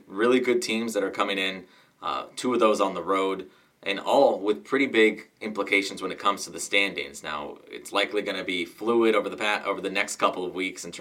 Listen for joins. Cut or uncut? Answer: uncut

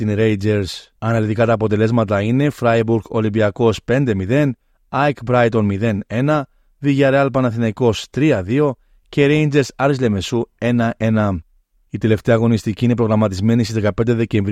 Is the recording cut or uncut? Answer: cut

